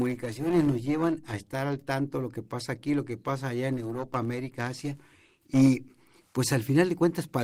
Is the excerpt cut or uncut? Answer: uncut